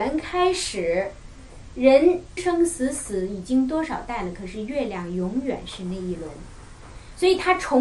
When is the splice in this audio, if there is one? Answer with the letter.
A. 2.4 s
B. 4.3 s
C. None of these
A